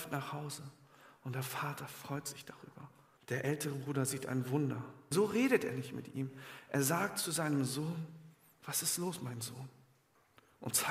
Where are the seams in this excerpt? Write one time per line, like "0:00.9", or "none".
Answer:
0:03.2
0:05.1